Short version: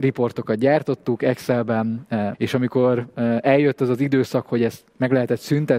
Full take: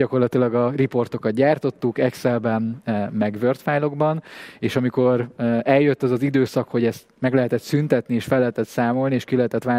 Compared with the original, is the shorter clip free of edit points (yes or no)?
no